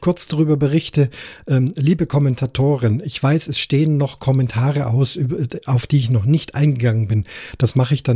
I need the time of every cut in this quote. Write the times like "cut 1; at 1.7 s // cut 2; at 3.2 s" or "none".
none